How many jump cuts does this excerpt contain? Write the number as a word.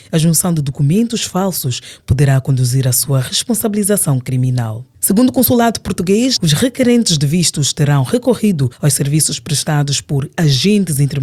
one